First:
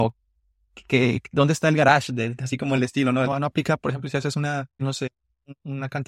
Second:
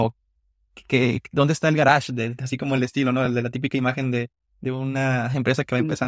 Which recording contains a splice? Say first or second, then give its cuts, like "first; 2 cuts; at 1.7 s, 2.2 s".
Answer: first; 2 cuts; at 3.3 s, 4.8 s